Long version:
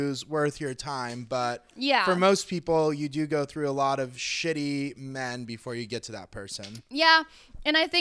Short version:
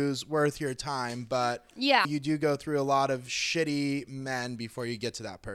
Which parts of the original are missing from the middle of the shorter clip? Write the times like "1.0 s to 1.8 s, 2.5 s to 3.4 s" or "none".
2.0 s to 2.9 s